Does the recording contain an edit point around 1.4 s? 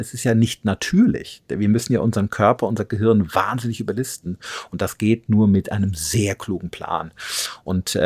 no; 0 cuts

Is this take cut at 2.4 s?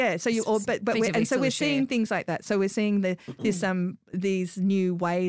no; 0 cuts

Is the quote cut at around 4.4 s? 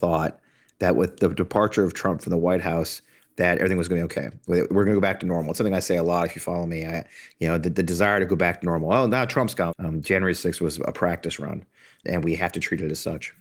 no; 2 cuts; at 9.7 s, 12.0 s

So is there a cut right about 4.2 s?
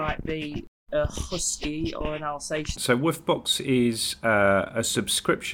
no; 1 cut; at 2.8 s

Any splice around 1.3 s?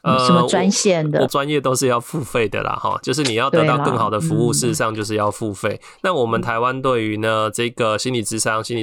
yes; 1 cut; at 1.3 s

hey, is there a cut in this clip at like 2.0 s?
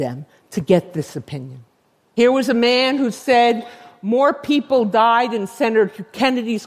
yes; 1 cut; at 2.0 s

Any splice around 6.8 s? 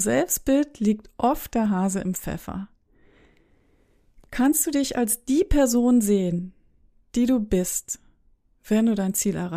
no; 0 cuts

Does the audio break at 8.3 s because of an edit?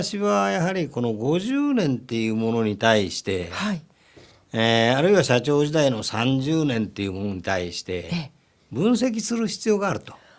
no; 0 cuts

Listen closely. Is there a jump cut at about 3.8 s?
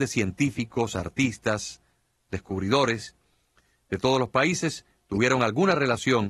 no; 1 cut; at 2.3 s

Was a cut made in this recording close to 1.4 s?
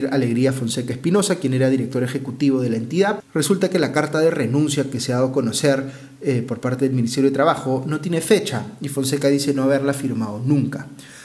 no; 1 cut; at 3.2 s

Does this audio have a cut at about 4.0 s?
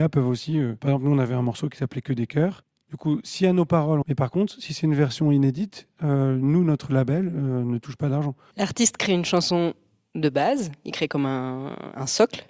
yes; 3 cuts; at 2.8 s, 4.0 s, 8.5 s

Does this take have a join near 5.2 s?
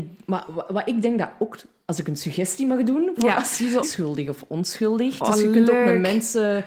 yes; 2 cuts; at 3.8 s, 5.2 s

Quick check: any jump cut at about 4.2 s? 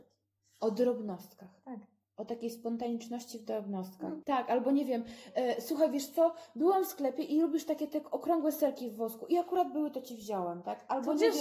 yes; 1 cut; at 4.2 s

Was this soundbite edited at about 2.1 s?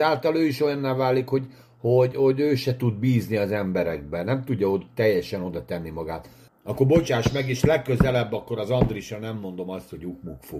yes; 2 cuts; at 2.1 s, 6.5 s

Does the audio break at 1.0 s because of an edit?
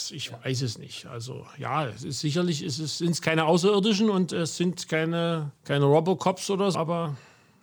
no; 2 cuts; at 5.6 s, 6.7 s

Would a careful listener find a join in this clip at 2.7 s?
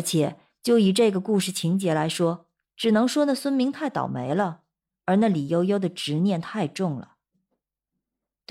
yes; 1 cut; at 2.7 s

